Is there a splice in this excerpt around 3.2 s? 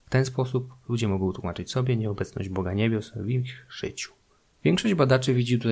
no; 1 cut; at 4.5 s

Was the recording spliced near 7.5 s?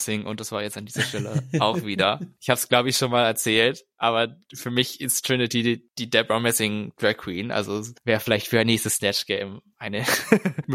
no; 0 cuts

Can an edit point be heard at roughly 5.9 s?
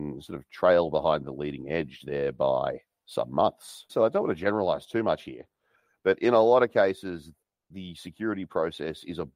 no; 1 cut; at 3.9 s

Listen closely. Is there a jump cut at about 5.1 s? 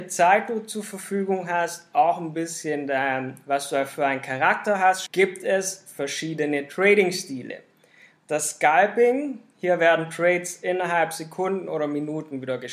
yes; 1 cut; at 5.1 s

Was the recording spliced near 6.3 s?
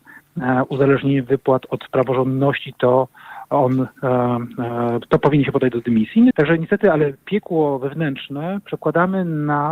yes; 1 cut; at 6.3 s

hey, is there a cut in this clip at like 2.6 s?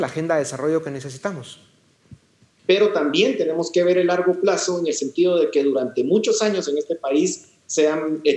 yes; 1 cut; at 2.6 s

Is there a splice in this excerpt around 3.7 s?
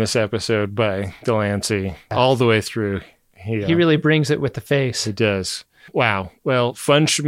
no; 0 cuts

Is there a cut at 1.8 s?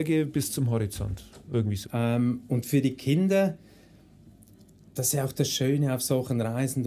yes; 1 cut; at 1.8 s

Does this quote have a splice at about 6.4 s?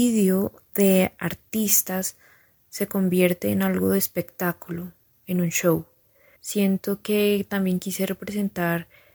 yes; 1 cut; at 6.4 s

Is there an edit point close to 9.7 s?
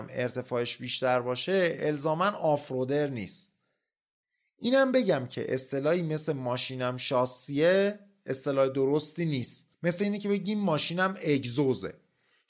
yes; 1 cut; at 9.7 s

